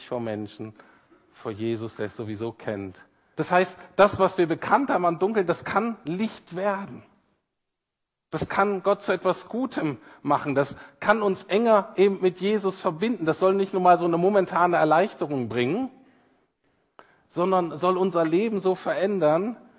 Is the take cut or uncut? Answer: cut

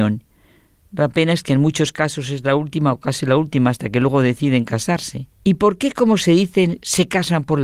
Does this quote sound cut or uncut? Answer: cut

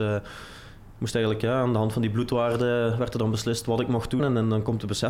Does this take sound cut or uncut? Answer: cut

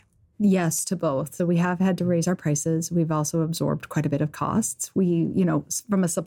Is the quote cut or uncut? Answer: cut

